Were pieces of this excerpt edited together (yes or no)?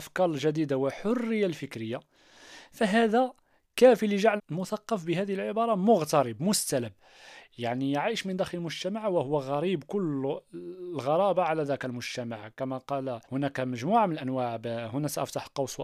yes